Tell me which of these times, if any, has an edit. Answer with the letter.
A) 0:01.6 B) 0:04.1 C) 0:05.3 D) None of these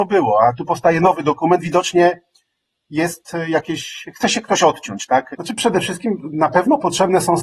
C